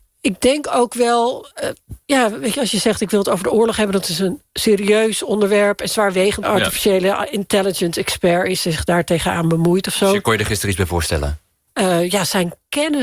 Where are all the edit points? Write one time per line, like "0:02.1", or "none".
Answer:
0:06.4
0:11.7